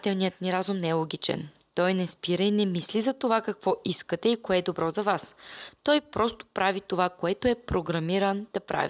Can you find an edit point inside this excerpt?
no; 0 cuts

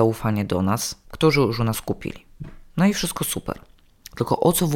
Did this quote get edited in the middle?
yes; 1 cut; at 1.0 s

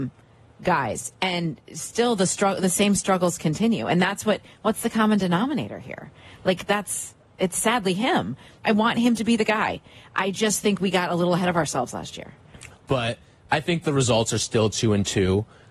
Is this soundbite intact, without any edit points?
no; 2 cuts; at 8.6 s, 12.7 s

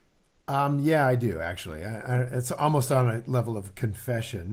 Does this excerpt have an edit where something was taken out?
no; 0 cuts

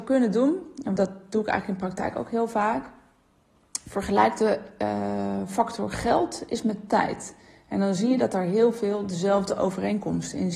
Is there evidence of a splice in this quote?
yes; 1 cut; at 1.0 s

